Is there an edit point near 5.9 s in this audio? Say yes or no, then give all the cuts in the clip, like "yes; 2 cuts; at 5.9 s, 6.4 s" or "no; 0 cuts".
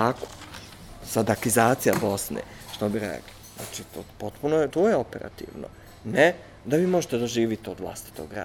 no; 1 cut; at 4.7 s